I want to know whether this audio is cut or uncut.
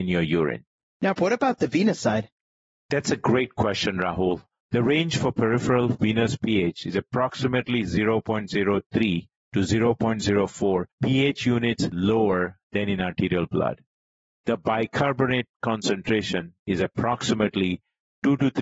cut